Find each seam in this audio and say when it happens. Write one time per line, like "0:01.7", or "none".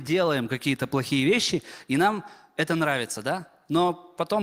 none

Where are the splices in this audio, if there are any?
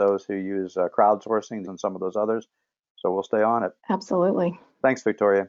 0:01.6
0:03.8

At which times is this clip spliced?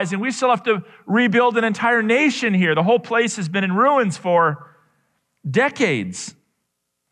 none

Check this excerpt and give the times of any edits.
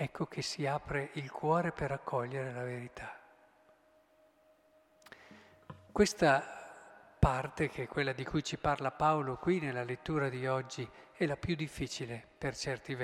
none

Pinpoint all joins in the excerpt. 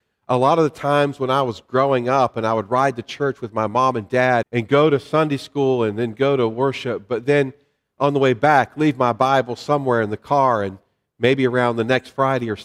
0:04.4

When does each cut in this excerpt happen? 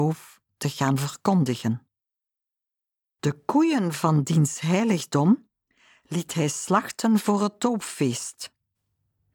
0:03.2

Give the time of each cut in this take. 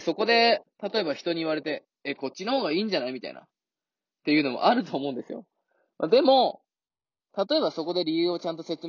none

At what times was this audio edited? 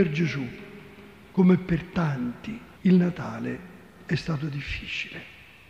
0:02.8

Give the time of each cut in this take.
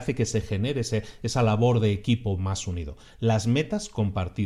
none

